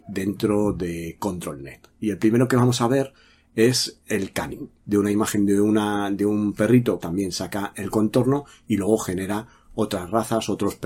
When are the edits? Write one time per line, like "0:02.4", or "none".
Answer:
0:04.8
0:07.0